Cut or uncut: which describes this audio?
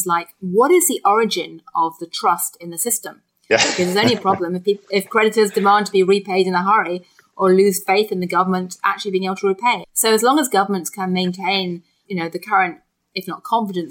cut